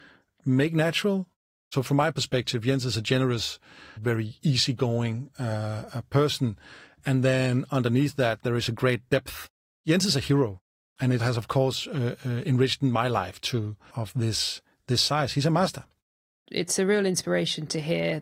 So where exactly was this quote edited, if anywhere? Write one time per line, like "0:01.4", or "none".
0:04.0
0:13.9